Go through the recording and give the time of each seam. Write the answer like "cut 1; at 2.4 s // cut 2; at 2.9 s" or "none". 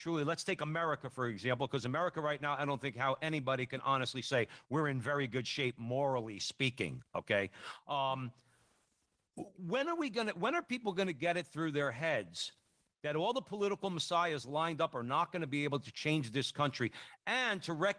none

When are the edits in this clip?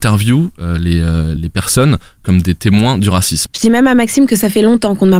cut 1; at 1.4 s // cut 2; at 3.5 s

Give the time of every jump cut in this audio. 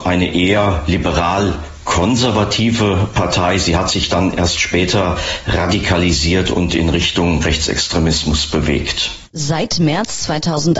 cut 1; at 9.3 s

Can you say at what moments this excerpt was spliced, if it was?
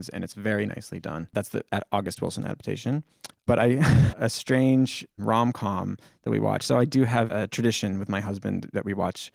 cut 1; at 4.1 s // cut 2; at 7.3 s

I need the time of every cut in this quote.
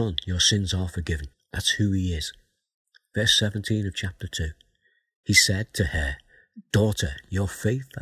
cut 1; at 1.3 s // cut 2; at 5.2 s

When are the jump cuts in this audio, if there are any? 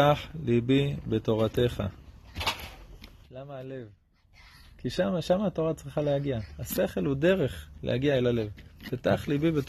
cut 1; at 3.2 s

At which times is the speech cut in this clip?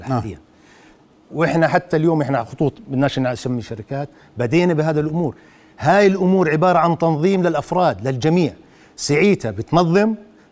cut 1; at 1.3 s

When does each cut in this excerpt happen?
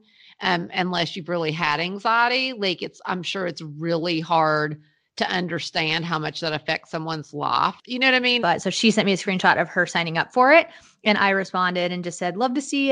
cut 1; at 8.4 s

